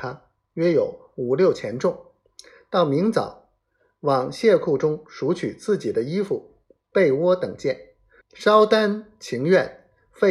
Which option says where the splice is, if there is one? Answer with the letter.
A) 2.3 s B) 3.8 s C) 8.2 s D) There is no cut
C